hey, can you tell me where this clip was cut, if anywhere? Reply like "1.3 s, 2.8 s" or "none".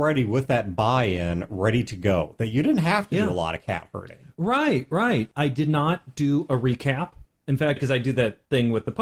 7.8 s